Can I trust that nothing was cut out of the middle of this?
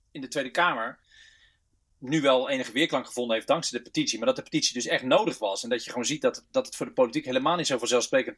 yes; 0 cuts

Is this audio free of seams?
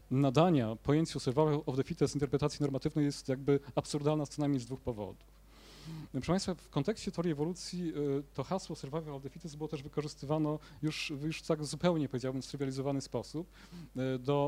yes; 0 cuts

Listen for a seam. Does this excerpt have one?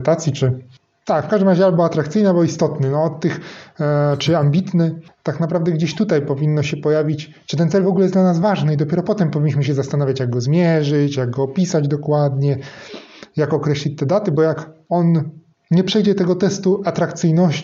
no; 0 cuts

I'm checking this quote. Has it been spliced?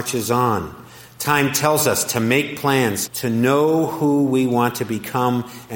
yes; 1 cut; at 3.1 s

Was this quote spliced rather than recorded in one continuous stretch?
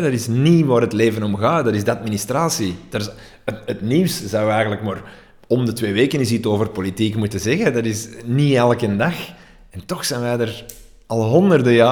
no; 0 cuts

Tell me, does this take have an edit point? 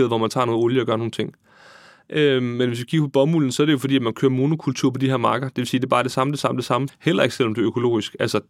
yes; 1 cut; at 6.9 s

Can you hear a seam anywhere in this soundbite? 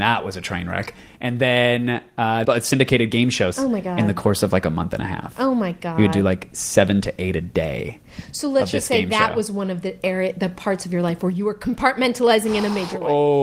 yes; 2 cuts; at 2.4 s, 3.5 s

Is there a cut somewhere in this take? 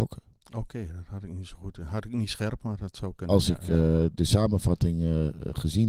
no; 0 cuts

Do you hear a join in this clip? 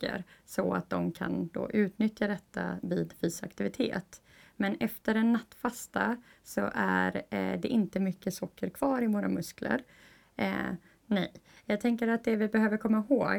yes; 1 cut; at 10.9 s

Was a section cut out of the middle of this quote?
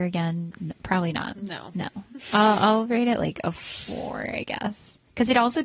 no; 0 cuts

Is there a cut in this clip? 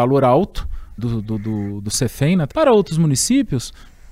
yes; 2 cuts; at 1.0 s, 2.5 s

